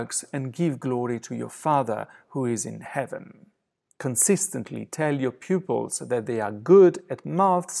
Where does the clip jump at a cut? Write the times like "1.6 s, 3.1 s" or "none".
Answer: 3.9 s